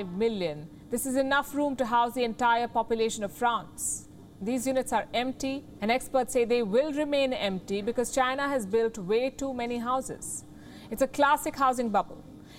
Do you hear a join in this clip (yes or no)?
yes